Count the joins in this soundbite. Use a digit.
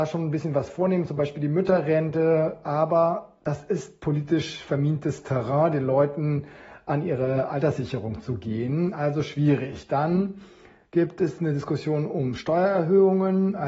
0